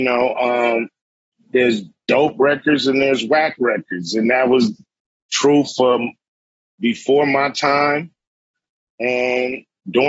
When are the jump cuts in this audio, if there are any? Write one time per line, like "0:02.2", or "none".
none